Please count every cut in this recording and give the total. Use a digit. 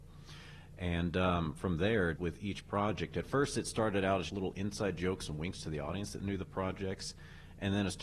2